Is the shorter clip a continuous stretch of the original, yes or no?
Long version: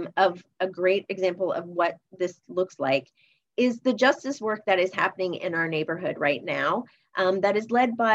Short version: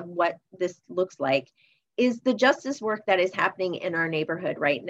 yes